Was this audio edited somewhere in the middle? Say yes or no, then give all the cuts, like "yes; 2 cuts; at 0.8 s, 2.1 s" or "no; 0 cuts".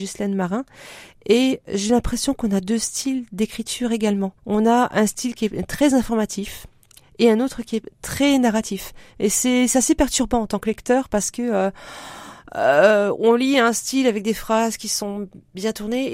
yes; 1 cut; at 4.4 s